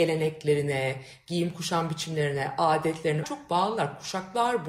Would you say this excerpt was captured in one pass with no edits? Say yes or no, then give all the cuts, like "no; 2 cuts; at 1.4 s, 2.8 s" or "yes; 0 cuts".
no; 1 cut; at 3.2 s